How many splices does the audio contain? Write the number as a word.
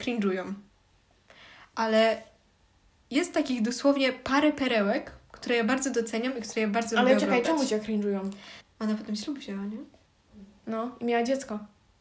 one